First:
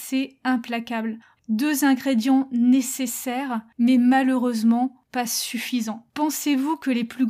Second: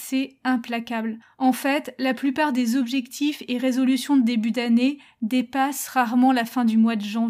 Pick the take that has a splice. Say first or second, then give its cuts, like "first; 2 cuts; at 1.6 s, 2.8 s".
first; 2 cuts; at 1.4 s, 6.1 s